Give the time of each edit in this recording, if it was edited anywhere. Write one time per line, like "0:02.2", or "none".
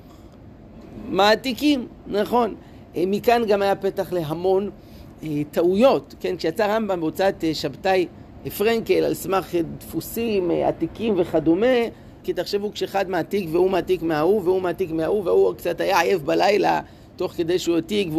0:12.2